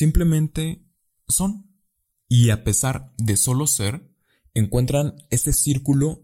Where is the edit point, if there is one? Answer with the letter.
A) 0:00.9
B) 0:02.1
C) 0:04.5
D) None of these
B